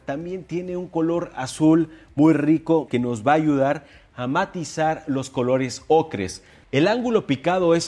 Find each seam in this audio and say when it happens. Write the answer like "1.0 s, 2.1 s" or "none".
2.9 s, 6.6 s